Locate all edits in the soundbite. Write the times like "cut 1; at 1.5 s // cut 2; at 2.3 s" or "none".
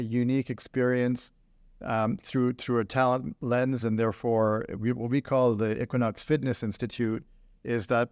none